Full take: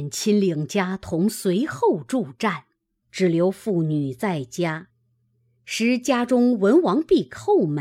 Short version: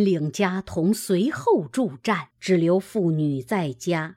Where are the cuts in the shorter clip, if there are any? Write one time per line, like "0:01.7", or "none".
0:02.3